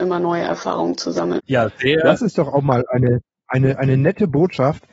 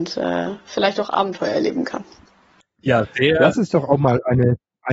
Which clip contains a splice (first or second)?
first